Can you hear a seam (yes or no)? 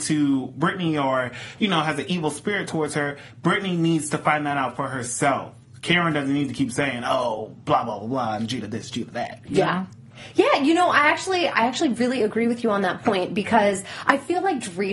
no